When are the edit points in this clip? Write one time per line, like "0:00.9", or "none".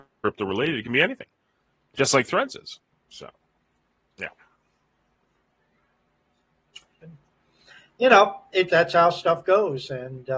0:07.0
0:08.7

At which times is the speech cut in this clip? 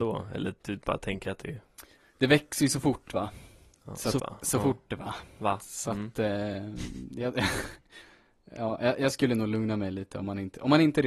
0:04.2

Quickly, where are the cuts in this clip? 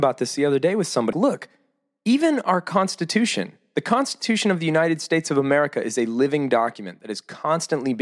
0:01.1

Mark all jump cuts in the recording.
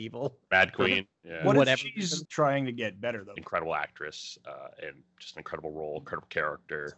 0:02.2
0:03.4

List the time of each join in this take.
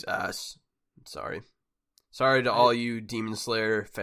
none

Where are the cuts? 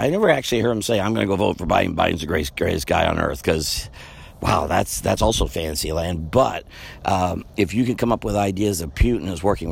none

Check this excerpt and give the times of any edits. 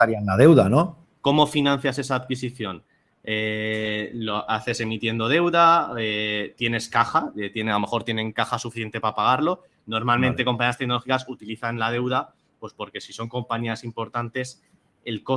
0:01.2

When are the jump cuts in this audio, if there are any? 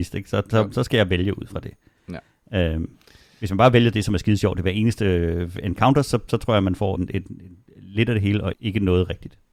0:07.0
0:08.5

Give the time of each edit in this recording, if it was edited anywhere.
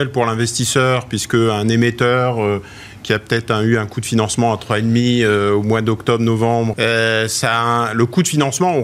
0:06.7

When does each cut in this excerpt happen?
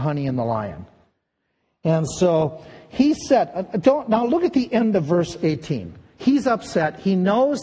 none

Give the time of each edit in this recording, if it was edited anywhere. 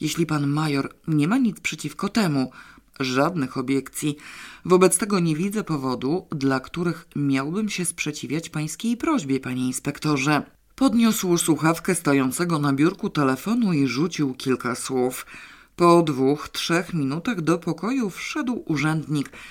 none

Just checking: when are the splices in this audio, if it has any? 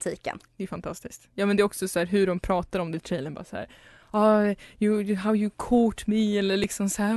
none

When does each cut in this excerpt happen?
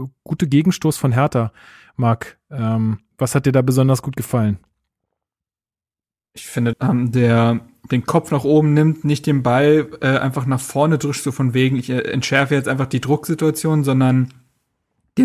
0:06.7

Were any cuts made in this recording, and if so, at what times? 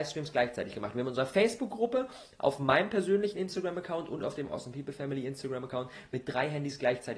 none

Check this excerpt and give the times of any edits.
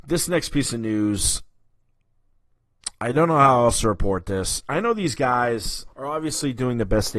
0:05.9

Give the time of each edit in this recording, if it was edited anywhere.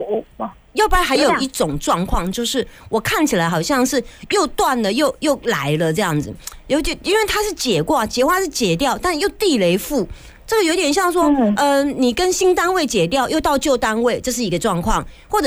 none

